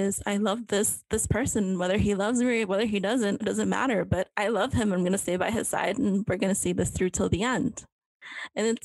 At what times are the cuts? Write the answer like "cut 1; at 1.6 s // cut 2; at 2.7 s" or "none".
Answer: cut 1; at 3.4 s